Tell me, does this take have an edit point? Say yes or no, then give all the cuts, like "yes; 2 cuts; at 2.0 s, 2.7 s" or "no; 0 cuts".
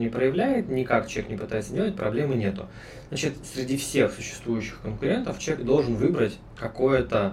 no; 0 cuts